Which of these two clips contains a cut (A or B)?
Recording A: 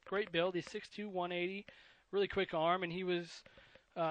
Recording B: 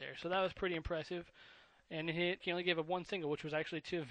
B